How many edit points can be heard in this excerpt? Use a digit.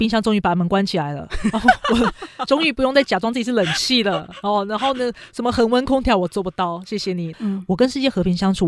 1